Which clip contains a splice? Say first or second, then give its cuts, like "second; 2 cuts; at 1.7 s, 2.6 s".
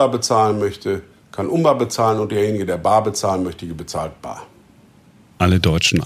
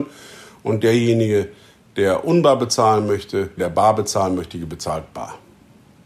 second; 1 cut; at 3.6 s